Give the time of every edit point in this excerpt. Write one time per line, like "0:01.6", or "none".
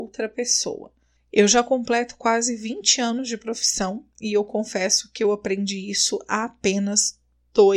0:01.2